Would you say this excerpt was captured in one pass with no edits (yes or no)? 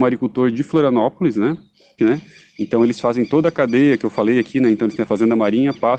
no